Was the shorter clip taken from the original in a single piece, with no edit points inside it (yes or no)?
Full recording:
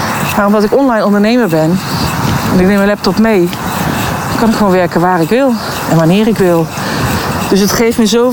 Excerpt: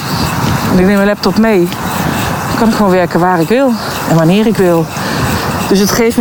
yes